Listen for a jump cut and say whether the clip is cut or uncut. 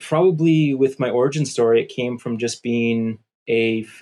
uncut